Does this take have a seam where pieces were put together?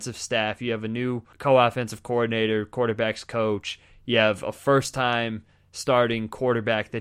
yes; 1 cut; at 1.3 s

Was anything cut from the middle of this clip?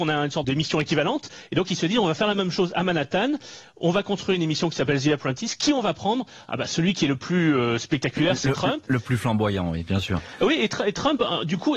no; 0 cuts

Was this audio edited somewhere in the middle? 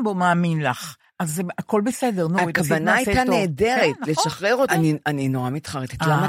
yes; 1 cut; at 4.7 s

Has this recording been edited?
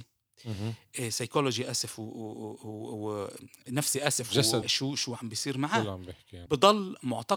yes; 2 cuts; at 4.6 s, 6.5 s

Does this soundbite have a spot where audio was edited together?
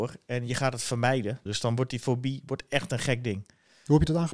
yes; 1 cut; at 1.5 s

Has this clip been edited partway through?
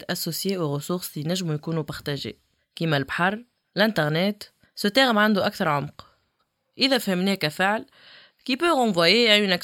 yes; 1 cut; at 4.6 s

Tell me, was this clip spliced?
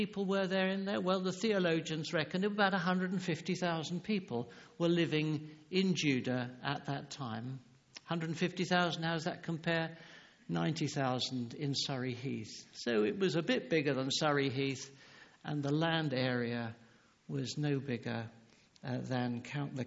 no; 0 cuts

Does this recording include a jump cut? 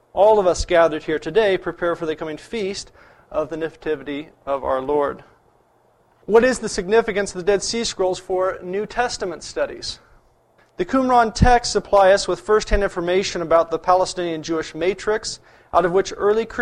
no; 0 cuts

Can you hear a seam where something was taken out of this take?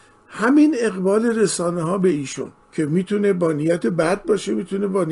yes; 1 cut; at 2.6 s

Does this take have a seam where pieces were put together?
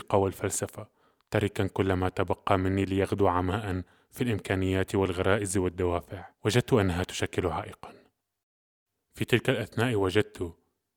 yes; 2 cuts; at 1.2 s, 6.3 s

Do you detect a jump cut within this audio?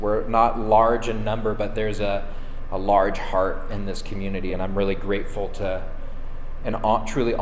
no; 0 cuts

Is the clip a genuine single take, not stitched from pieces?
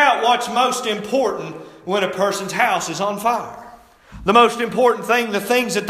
yes; 0 cuts

